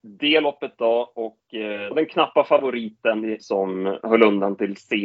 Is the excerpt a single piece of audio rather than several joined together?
no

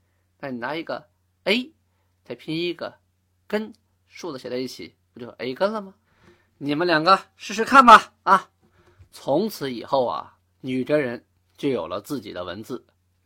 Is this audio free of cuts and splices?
yes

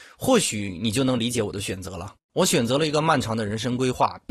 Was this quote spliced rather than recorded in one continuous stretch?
no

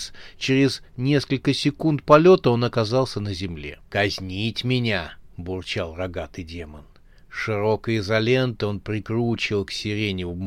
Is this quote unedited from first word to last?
no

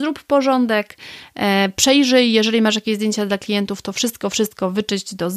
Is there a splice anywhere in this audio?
no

